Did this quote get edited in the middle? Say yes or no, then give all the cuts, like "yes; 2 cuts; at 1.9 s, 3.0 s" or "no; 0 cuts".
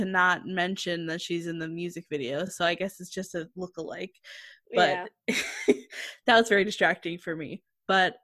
no; 0 cuts